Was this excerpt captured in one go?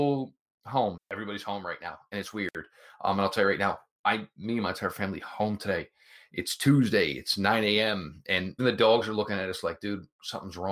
no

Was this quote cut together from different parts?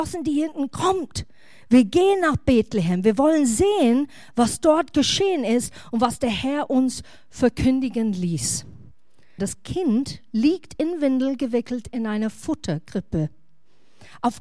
yes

